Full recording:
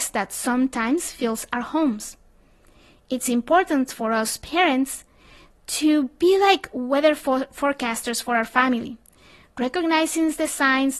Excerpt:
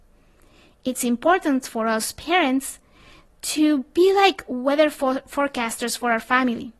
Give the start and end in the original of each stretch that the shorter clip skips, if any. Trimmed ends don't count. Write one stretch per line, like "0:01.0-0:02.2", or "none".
none